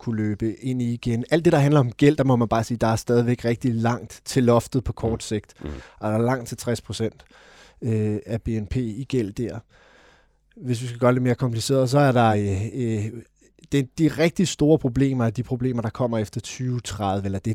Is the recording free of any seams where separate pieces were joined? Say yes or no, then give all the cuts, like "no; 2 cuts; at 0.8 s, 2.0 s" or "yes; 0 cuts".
yes; 0 cuts